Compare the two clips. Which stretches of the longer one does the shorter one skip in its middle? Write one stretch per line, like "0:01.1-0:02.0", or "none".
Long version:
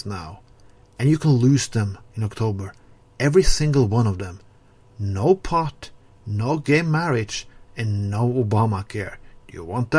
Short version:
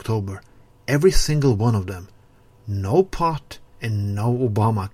0:06.0-0:07.6